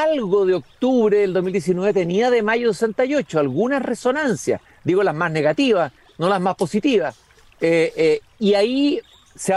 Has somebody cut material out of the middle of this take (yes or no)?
no